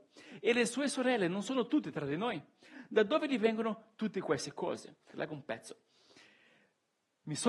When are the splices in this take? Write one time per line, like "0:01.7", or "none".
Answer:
0:05.1